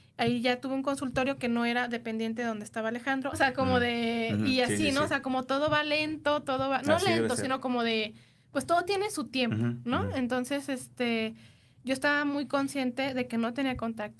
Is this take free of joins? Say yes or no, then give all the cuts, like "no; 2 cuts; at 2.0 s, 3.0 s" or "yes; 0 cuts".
no; 1 cut; at 3.3 s